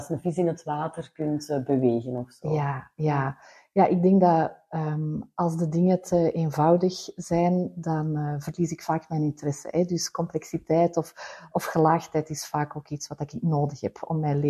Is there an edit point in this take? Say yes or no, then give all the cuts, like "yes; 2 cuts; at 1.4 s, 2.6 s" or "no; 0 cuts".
no; 0 cuts